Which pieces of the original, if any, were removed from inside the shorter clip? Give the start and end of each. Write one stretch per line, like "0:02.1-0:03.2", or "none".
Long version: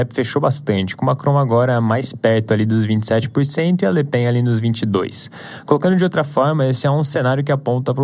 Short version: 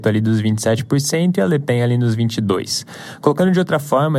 none